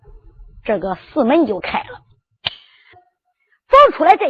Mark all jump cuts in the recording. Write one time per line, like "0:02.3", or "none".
0:02.9